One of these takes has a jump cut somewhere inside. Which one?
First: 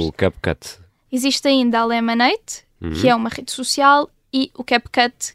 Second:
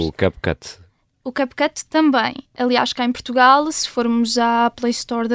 first; 1 cut; at 1.1 s

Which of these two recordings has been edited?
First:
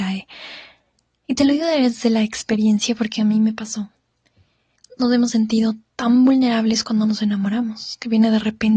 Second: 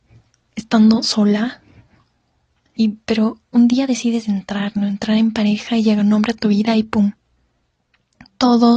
second; 1 cut; at 2.8 s

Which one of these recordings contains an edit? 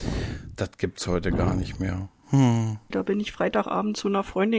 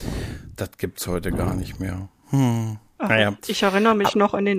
first; 1 cut; at 2.9 s

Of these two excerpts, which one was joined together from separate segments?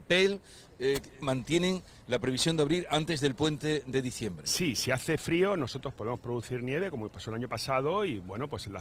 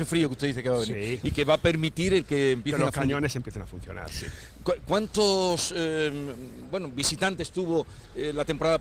first; 1 cut; at 1.2 s

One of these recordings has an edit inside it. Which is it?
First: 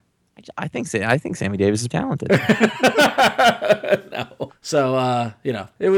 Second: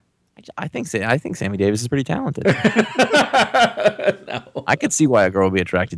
first; 2 cuts; at 1.9 s, 4.5 s

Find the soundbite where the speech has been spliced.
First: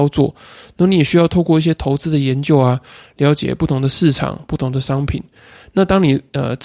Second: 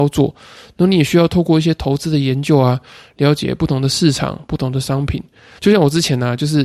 second; 1 cut; at 5.6 s

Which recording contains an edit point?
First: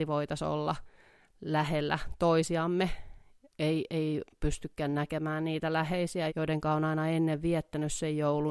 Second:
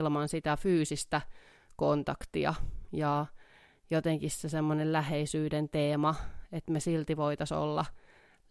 first; 2 cuts; at 3.5 s, 6.3 s

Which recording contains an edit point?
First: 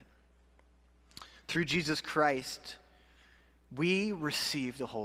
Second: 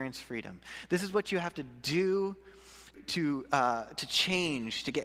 second; 1 cut; at 2.9 s

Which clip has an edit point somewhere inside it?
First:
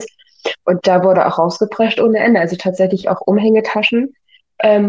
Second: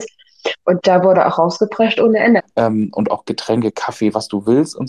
second; 1 cut; at 2.4 s

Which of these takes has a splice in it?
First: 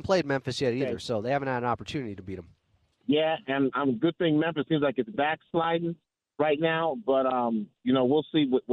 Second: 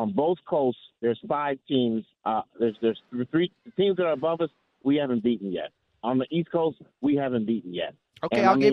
second; 2 cuts; at 2.1 s, 6.0 s

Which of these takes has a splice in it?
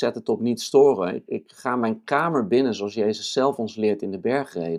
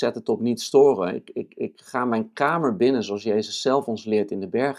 first; 1 cut; at 1.3 s

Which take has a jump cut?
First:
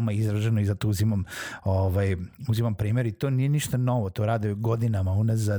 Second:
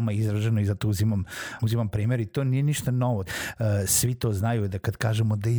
second; 2 cuts; at 1.6 s, 3.3 s

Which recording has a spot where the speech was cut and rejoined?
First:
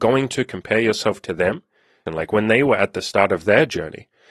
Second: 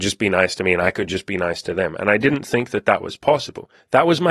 first; 1 cut; at 2.1 s

